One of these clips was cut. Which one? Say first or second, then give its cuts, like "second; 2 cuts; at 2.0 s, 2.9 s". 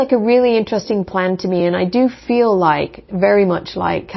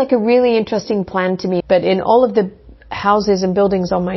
second; 1 cut; at 1.6 s